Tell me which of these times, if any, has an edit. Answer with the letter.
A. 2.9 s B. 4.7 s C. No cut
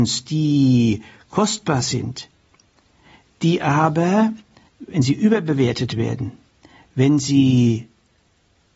B